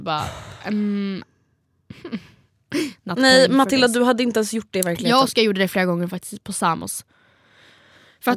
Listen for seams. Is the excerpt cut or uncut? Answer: uncut